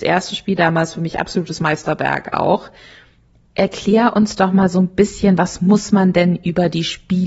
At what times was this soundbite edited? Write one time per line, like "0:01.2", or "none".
none